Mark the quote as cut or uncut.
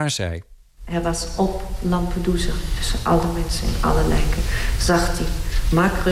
uncut